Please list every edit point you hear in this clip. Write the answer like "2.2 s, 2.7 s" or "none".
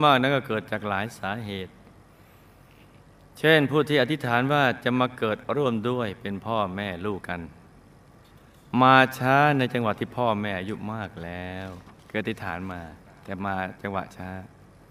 7.2 s, 12.0 s